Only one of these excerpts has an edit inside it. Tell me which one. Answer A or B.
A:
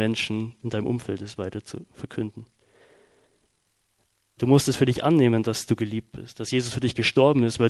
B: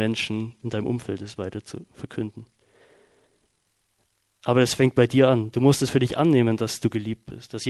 A